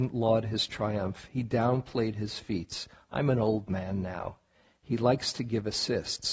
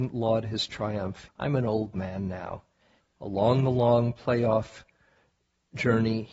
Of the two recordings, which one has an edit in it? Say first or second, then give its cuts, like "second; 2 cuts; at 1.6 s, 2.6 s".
second; 2 cuts; at 1.3 s, 3.0 s